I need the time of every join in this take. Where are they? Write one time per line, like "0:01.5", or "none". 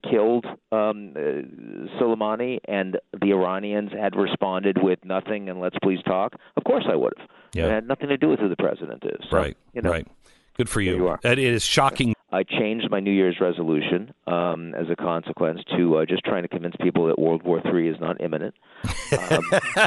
0:12.1